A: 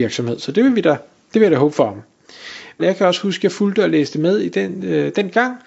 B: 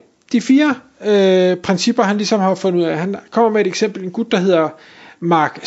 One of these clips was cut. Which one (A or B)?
A